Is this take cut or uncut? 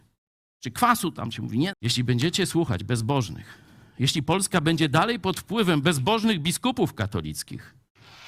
cut